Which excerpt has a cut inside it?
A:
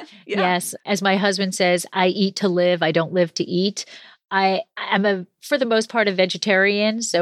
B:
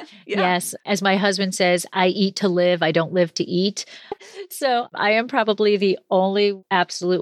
B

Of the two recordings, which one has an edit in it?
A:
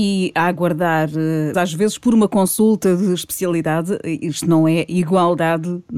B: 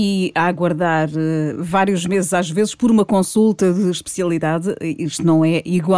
A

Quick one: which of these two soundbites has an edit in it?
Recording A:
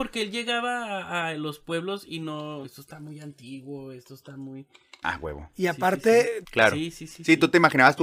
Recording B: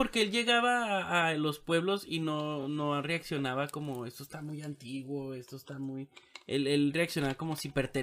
A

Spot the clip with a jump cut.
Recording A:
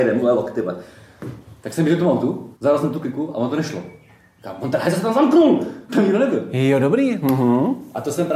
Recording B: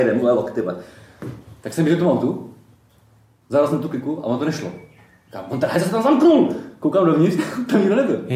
A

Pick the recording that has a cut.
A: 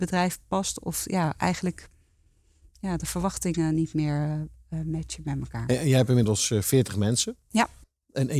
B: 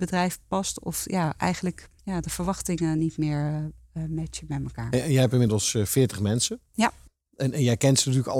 B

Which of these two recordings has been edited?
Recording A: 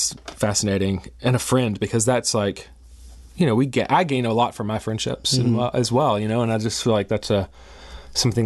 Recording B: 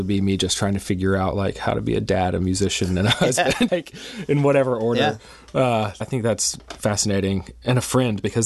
B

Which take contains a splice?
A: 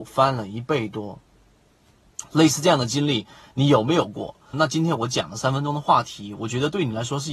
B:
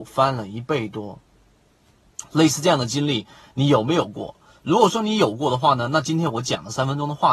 A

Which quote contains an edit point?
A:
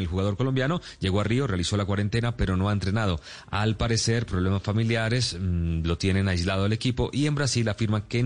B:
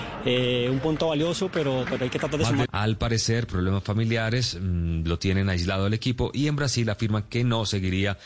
B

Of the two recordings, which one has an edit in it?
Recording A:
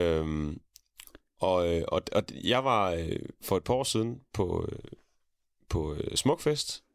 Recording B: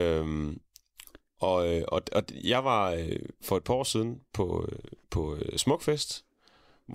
B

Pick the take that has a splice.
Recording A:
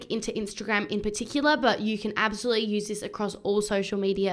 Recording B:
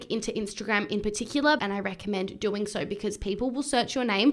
B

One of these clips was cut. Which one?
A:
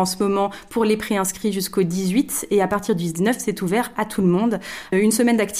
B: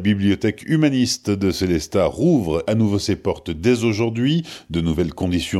B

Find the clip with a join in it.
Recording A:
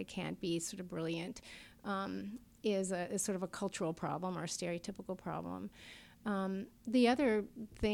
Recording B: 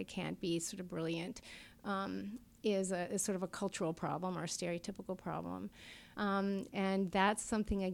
B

